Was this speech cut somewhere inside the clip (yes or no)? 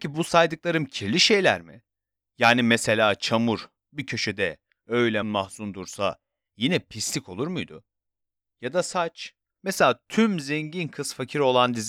yes